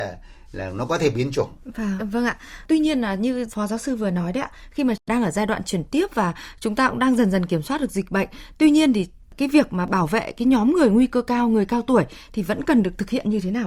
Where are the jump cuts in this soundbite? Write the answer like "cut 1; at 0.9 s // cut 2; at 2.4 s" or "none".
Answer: cut 1; at 2.0 s